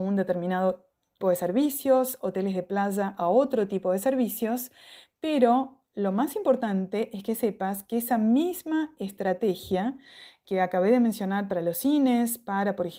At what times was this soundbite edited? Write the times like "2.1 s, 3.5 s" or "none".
1.2 s

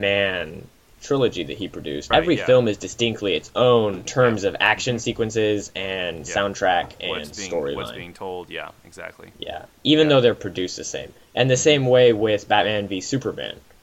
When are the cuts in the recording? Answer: 2.1 s, 4.0 s

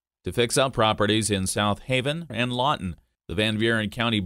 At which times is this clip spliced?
2.3 s

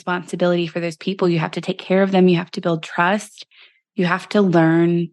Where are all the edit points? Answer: none

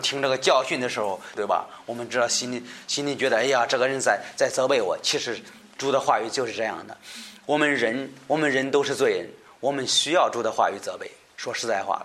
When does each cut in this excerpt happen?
1.4 s

